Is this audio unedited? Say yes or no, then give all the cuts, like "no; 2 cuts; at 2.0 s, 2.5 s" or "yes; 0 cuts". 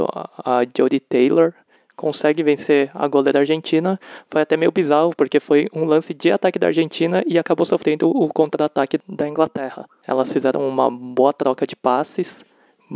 yes; 0 cuts